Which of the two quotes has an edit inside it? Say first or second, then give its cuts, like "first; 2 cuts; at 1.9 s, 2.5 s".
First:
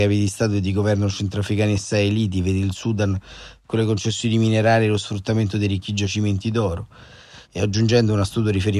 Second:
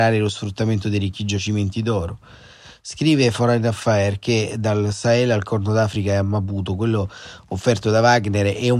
first; 1 cut; at 7.4 s